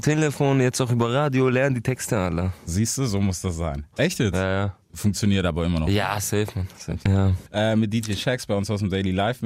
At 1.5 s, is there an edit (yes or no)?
no